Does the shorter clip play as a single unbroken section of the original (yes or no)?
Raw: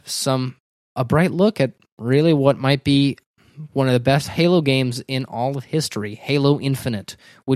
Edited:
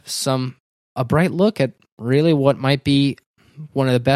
yes